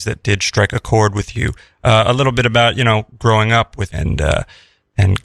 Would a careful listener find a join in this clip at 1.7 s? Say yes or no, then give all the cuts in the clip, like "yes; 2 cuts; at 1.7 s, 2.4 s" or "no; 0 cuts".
no; 1 cut; at 3.9 s